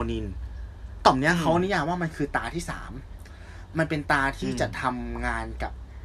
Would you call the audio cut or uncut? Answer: uncut